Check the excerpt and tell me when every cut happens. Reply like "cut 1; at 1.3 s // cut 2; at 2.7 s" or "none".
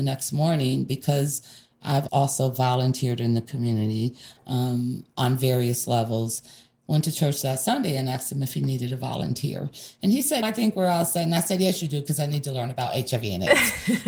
cut 1; at 2.1 s // cut 2; at 10.4 s